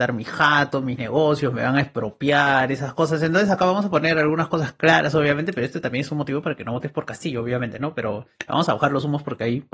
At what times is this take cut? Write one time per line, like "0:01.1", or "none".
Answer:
none

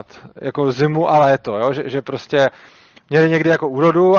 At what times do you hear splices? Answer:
none

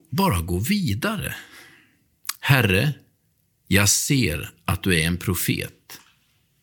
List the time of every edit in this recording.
0:02.4

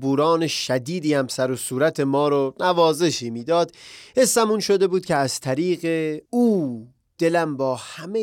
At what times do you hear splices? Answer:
0:06.3

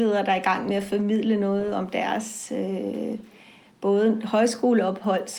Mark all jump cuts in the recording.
none

